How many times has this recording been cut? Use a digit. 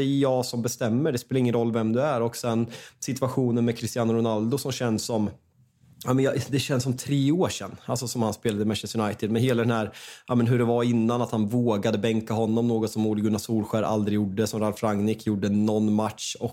0